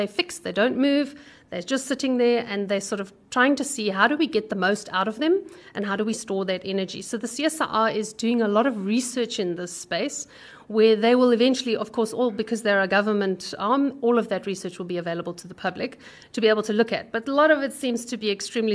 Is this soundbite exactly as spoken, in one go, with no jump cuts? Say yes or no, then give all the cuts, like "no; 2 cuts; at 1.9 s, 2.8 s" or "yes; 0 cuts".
yes; 0 cuts